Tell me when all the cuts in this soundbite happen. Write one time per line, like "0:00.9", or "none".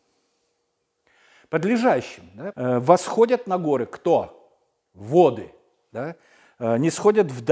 0:02.5